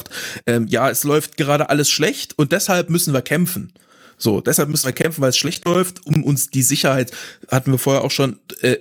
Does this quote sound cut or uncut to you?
uncut